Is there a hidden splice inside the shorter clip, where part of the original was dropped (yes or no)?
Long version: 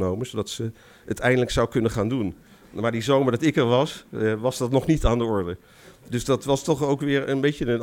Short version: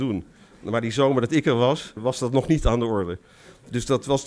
yes